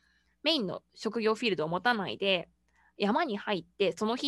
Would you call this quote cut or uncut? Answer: uncut